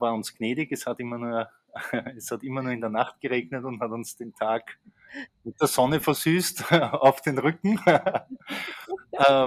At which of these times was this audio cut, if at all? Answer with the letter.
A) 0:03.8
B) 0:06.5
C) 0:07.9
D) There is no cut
D